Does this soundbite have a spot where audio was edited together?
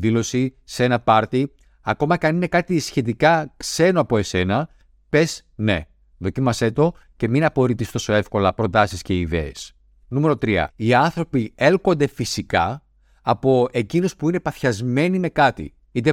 yes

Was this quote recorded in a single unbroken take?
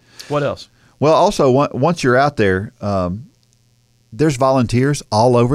yes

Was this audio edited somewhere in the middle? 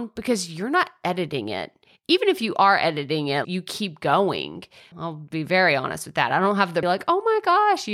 yes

